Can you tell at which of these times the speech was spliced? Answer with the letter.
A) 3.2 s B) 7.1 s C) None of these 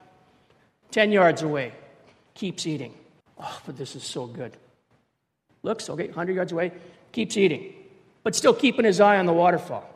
A